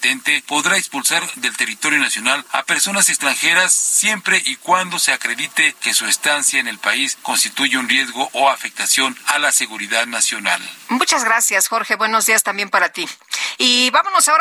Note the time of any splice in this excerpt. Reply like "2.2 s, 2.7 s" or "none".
10.9 s

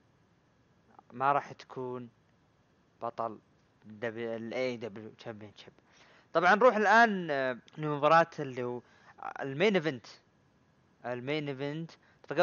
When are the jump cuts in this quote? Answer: 7.7 s

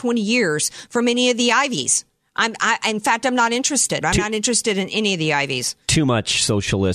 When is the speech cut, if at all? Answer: 4.0 s

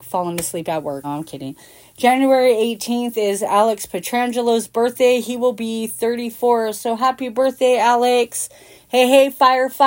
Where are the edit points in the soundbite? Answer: 1.0 s, 8.8 s

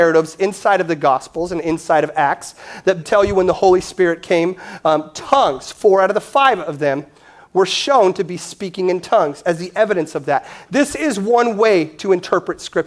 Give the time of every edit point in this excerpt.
3.0 s

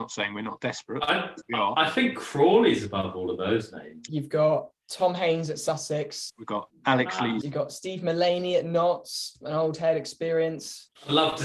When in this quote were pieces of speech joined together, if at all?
4.1 s, 6.3 s, 7.4 s

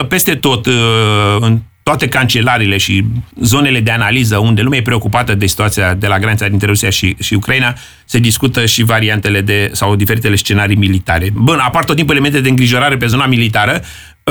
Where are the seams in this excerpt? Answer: 3.3 s, 11.4 s

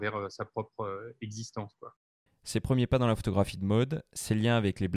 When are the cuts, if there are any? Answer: 2.3 s

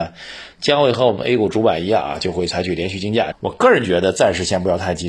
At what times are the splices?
3.3 s

